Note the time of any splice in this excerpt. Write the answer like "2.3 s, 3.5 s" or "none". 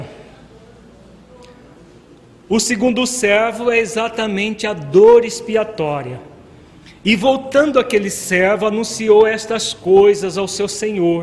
none